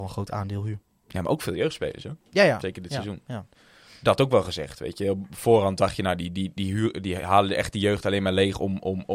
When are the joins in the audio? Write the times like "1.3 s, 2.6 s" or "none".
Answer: none